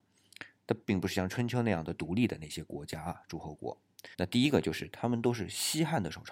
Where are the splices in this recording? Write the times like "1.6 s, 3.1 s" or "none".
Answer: 4.1 s